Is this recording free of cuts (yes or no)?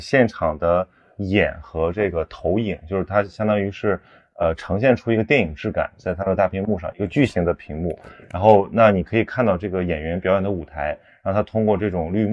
yes